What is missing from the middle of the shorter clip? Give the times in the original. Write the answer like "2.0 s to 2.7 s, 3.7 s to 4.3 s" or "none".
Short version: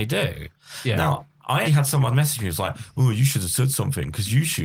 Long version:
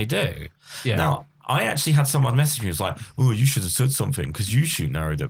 1.6 s to 1.9 s